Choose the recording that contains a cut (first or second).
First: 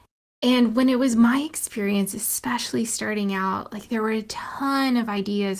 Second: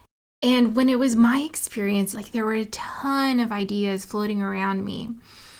second